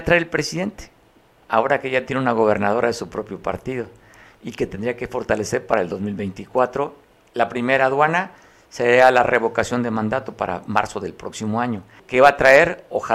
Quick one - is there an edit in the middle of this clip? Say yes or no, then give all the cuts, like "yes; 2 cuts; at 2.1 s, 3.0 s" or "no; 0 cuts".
yes; 1 cut; at 12.0 s